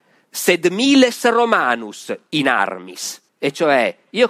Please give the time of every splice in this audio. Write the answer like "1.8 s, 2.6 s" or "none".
3.3 s